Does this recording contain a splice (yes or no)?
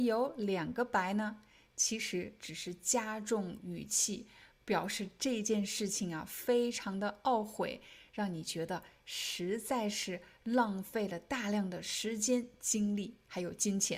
no